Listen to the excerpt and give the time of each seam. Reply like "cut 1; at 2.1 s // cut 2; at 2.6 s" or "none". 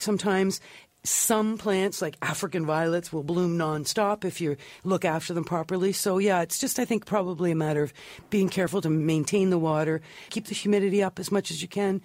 cut 1; at 10.3 s